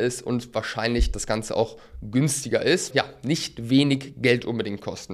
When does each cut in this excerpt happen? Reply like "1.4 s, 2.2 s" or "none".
2.9 s